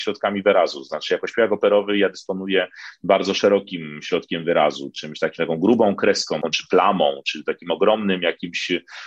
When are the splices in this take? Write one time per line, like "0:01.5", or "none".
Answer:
none

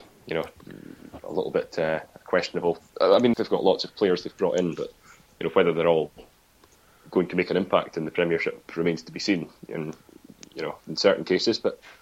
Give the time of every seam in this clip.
0:03.3

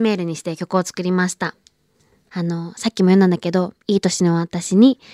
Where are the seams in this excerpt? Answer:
0:02.3

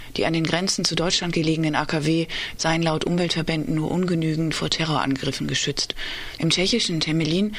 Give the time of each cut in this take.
0:02.6
0:06.4

